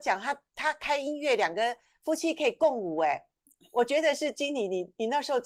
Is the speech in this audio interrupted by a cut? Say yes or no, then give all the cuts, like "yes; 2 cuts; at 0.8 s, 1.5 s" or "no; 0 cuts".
no; 0 cuts